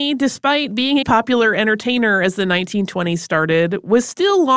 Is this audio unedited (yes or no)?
no